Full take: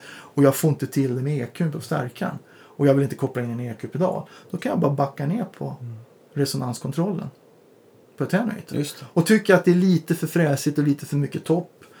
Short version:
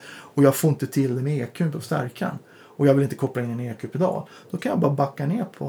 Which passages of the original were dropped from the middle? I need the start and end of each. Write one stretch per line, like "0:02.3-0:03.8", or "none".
none